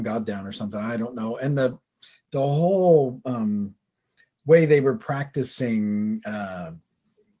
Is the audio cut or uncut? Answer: uncut